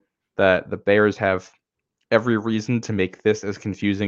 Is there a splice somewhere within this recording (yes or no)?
no